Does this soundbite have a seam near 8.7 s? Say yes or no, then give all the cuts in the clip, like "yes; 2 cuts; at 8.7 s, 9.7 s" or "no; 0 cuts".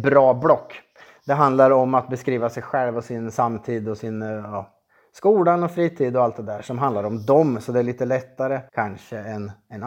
yes; 1 cut; at 8.7 s